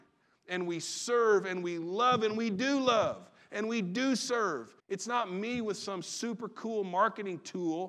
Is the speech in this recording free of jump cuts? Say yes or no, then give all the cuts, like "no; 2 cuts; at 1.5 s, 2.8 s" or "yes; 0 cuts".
no; 1 cut; at 4.8 s